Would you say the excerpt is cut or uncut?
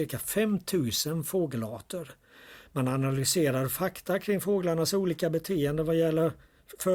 uncut